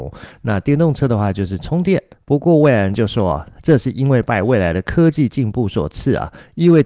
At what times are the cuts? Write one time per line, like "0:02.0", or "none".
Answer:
0:02.1